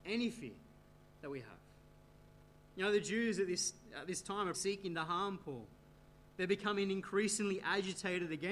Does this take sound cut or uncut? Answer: cut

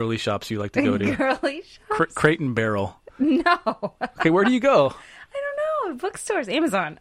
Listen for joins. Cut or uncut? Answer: uncut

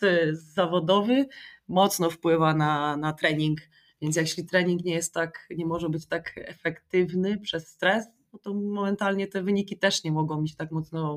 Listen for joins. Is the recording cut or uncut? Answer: uncut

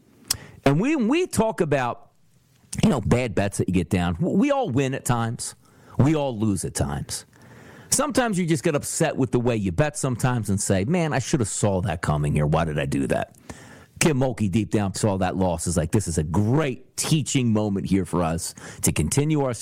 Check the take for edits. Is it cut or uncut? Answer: cut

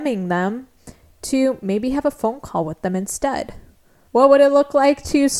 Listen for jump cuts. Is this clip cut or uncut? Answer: cut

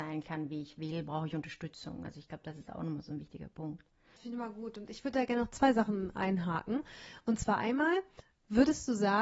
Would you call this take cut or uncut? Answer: uncut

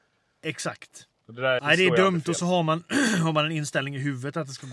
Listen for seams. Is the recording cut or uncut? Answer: cut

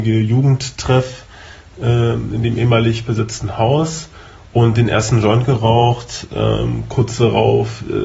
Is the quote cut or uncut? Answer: uncut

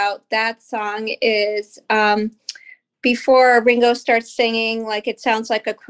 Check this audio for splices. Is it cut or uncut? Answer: uncut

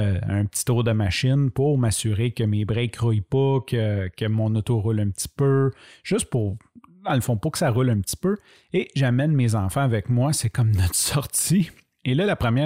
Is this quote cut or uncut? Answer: uncut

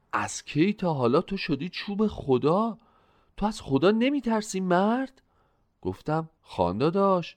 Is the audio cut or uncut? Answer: uncut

